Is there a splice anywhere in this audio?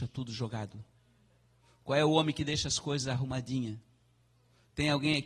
no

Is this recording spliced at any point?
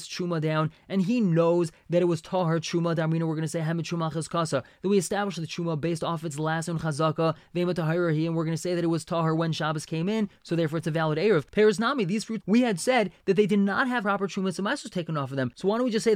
yes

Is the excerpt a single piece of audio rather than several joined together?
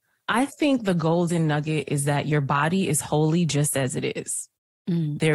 yes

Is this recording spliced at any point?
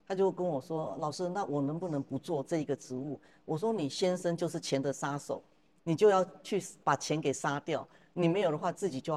no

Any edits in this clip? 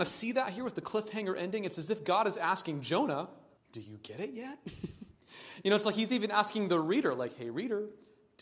yes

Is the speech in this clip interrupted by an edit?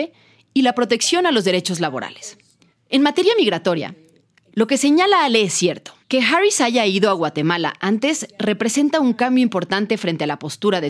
yes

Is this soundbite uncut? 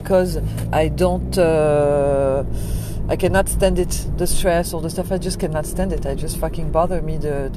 yes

